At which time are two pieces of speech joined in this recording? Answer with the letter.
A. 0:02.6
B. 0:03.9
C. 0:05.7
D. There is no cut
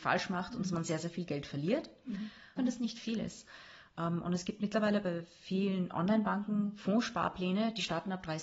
A